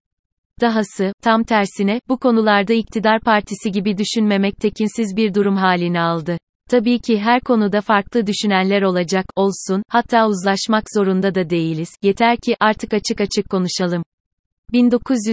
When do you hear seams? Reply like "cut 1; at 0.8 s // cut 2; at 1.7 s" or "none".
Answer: cut 1; at 1.2 s // cut 2; at 6.6 s